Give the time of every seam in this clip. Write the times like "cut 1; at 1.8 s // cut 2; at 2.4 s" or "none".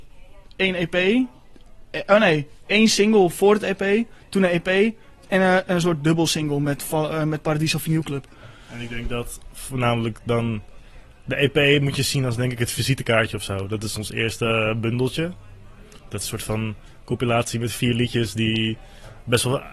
none